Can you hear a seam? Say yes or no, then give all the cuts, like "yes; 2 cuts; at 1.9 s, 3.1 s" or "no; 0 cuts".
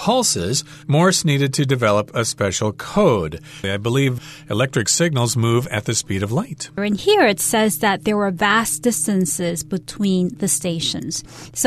yes; 2 cuts; at 3.6 s, 6.8 s